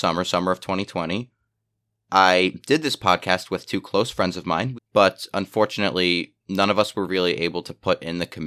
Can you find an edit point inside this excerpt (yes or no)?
yes